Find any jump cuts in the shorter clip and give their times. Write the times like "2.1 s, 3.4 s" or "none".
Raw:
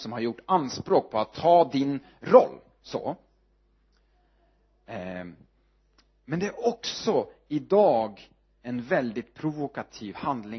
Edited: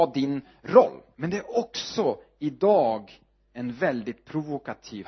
1.1 s